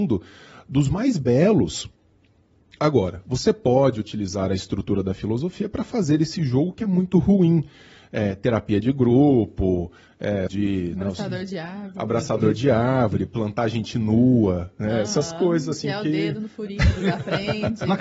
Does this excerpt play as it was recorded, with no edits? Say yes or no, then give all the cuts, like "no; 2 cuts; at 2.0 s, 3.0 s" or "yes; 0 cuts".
no; 1 cut; at 10.5 s